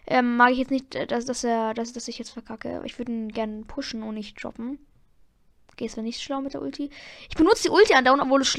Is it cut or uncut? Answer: uncut